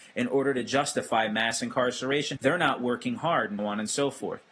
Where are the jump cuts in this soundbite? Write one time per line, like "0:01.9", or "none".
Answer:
0:02.4
0:03.6